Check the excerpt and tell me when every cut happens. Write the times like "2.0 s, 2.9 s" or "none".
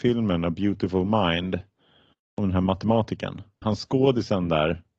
3.6 s